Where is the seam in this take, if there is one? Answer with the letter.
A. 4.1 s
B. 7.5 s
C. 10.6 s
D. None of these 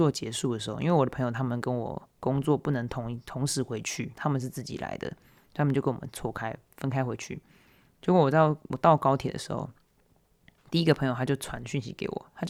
A